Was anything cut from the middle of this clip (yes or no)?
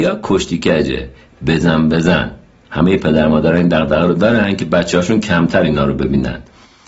yes